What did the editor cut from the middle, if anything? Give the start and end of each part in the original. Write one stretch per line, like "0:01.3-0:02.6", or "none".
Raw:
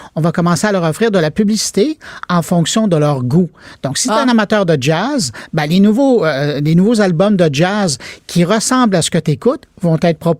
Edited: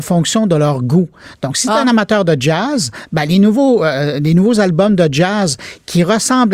none

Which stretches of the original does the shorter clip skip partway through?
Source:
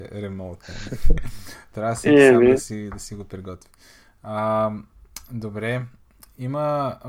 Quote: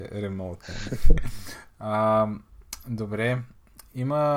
0:01.7-0:04.1

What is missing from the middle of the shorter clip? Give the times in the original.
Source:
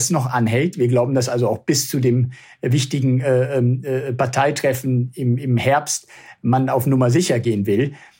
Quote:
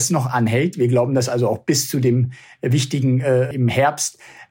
0:03.5-0:05.4

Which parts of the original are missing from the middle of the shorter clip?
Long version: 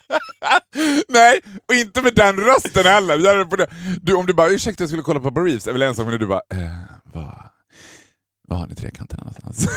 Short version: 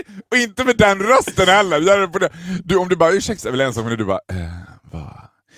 0:04.8-0:05.6

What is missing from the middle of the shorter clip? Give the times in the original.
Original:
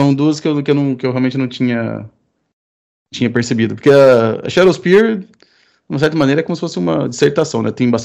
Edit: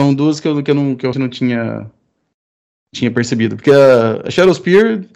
0:01.1-0:01.3

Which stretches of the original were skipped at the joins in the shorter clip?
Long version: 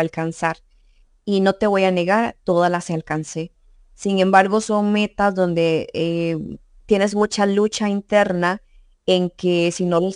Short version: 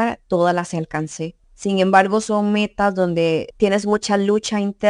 0:03.6-0:03.8
0:05.9-0:06.8

